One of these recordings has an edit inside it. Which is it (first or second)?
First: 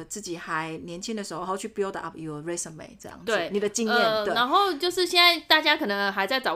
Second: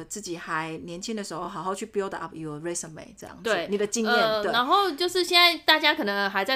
first